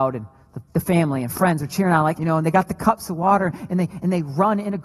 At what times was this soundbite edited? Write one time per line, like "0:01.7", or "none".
0:02.1